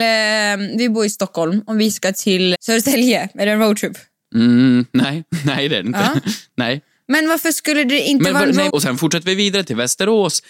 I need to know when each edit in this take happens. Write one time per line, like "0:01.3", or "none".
0:02.5
0:08.7